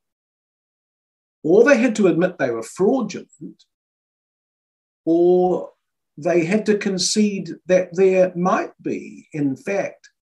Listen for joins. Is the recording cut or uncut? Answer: uncut